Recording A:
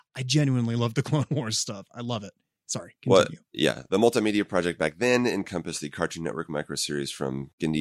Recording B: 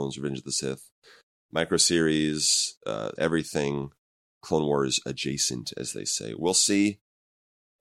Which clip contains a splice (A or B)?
B